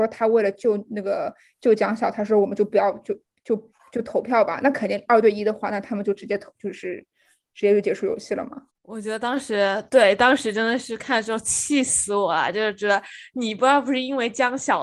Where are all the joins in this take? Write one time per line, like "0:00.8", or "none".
none